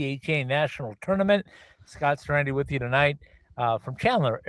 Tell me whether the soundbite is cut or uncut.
uncut